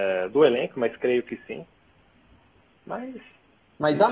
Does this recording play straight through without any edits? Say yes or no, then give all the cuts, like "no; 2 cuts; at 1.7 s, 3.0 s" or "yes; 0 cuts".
yes; 0 cuts